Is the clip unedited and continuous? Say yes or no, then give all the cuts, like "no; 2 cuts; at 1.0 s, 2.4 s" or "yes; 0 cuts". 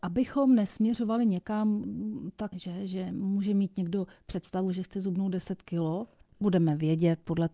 no; 2 cuts; at 2.5 s, 6.4 s